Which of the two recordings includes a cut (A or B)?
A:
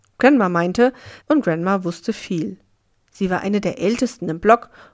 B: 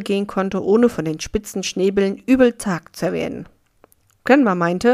A